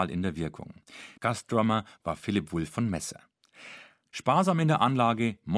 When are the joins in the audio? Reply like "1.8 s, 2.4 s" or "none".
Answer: 1.2 s, 4.1 s